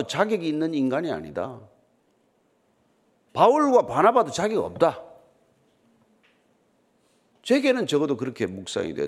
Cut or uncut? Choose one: uncut